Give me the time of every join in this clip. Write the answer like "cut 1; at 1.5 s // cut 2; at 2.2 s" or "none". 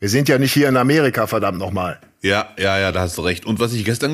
none